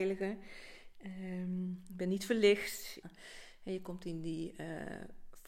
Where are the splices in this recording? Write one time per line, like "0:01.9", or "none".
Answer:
0:03.0